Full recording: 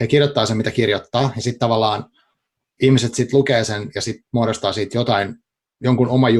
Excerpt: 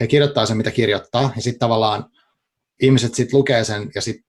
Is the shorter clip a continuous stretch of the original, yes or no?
yes